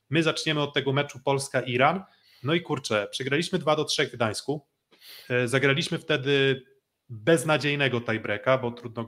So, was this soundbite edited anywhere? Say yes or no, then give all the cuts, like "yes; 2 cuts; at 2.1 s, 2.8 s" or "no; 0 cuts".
no; 0 cuts